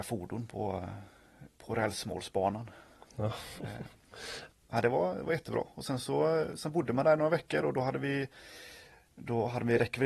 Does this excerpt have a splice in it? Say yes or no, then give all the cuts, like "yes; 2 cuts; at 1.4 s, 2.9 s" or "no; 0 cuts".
yes; 1 cut; at 4.5 s